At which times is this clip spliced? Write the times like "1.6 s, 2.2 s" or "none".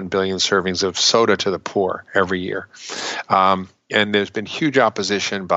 none